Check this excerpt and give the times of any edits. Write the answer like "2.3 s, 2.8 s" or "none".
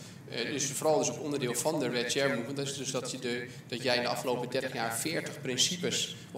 none

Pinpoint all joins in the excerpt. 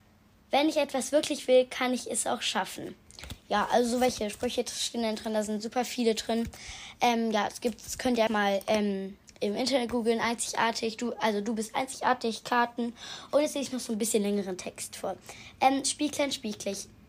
8.3 s, 13.3 s

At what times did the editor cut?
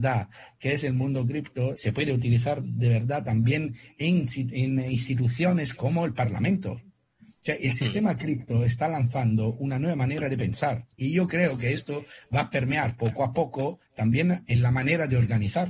1.8 s, 10.9 s

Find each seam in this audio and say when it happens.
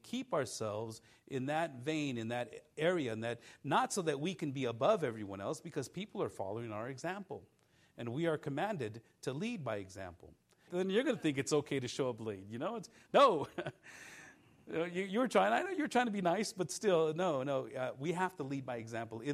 10.7 s

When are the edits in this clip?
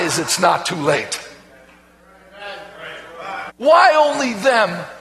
3.5 s

